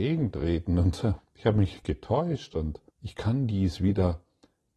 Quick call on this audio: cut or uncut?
cut